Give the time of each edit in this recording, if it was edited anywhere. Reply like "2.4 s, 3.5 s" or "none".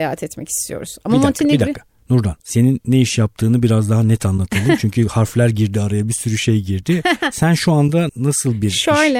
2.4 s, 8.1 s